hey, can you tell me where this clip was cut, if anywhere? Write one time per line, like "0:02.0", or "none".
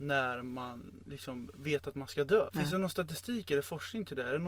0:02.5